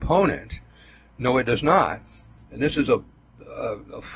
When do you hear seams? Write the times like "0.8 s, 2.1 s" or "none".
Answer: 2.4 s